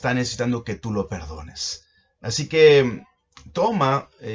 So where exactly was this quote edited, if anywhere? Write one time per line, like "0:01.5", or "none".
none